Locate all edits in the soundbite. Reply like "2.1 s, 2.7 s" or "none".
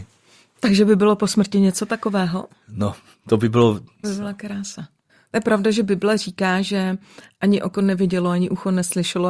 4.0 s